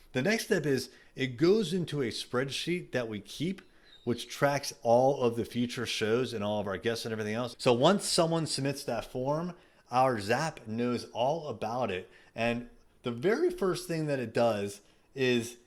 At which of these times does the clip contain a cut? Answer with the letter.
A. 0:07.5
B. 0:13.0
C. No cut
A